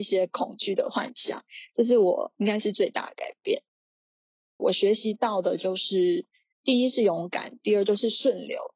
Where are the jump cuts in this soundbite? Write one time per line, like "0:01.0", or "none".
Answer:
0:04.6